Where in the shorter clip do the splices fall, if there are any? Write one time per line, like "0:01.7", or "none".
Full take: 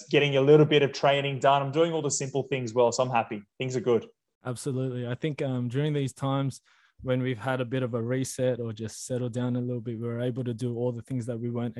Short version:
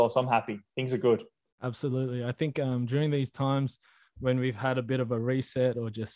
none